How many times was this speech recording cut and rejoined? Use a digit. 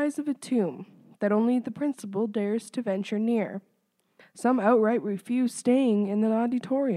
1